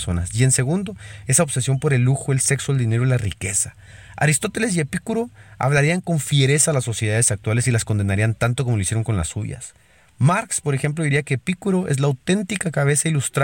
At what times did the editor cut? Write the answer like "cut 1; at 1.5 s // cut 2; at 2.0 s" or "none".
none